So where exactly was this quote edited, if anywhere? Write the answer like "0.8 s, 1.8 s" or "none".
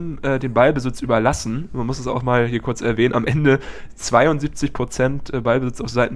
none